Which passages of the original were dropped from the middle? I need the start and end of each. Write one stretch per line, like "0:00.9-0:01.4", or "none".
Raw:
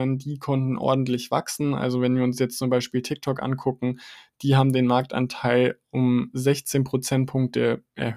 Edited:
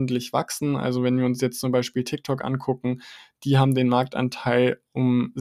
none